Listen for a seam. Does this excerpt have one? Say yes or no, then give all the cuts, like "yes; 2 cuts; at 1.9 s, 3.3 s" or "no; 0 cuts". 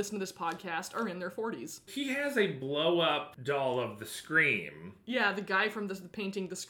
yes; 1 cut; at 1.9 s